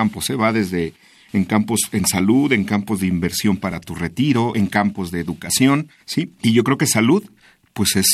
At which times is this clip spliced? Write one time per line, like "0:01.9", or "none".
none